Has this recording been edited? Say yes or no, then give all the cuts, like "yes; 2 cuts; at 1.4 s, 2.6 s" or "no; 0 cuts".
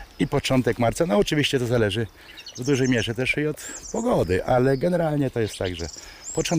no; 0 cuts